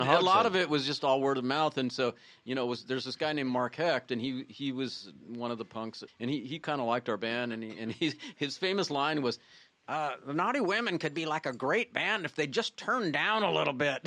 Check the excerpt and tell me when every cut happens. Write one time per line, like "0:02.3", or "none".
0:06.1